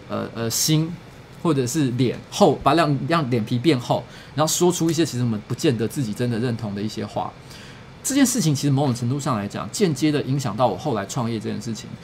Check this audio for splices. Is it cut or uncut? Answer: uncut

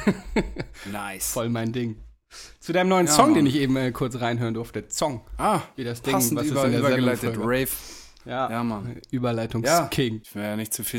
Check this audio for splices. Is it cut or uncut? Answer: uncut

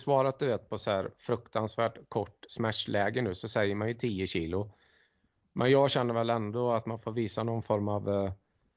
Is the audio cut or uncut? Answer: uncut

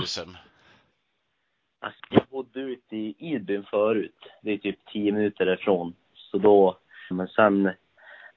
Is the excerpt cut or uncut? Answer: cut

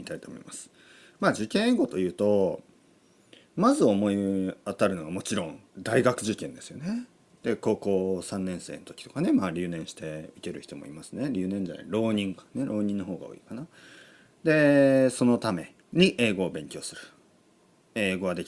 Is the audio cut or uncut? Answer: cut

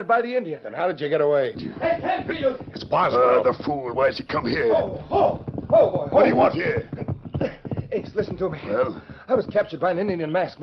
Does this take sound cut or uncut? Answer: cut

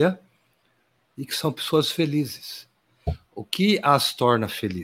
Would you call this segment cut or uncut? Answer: uncut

